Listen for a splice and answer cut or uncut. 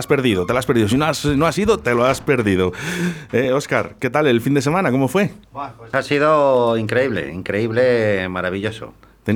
uncut